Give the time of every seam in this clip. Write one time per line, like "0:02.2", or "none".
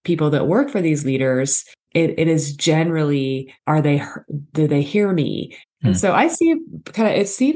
0:01.9
0:03.6
0:05.6